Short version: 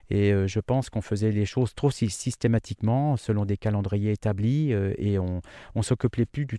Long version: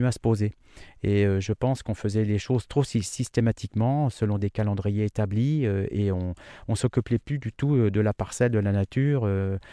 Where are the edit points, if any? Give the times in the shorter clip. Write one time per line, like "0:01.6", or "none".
none